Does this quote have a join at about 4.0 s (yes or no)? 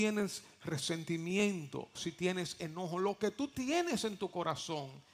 no